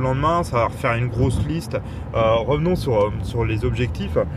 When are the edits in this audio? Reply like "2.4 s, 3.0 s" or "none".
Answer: 2.1 s

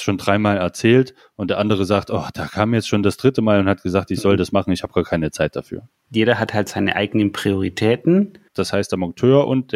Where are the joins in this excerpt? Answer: 6.1 s, 8.5 s

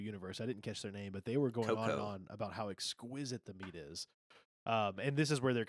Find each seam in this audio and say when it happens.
none

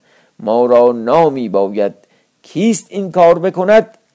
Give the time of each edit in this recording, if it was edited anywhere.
none

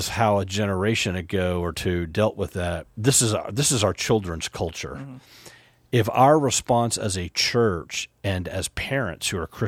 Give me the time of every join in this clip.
2.8 s

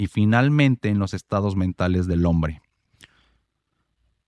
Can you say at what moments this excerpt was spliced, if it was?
none

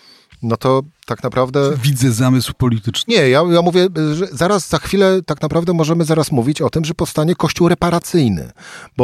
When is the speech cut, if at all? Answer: none

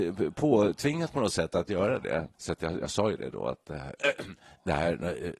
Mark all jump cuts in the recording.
2.3 s

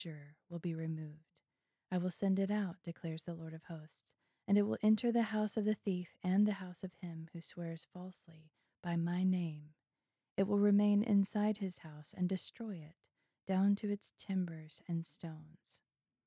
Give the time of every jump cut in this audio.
none

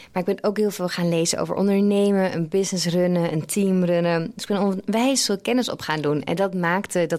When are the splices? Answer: none

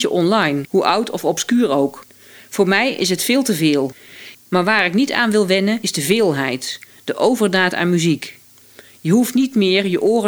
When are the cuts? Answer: 4.3 s

